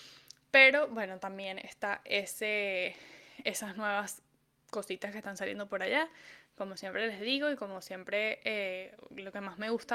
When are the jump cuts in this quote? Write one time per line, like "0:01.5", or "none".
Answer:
none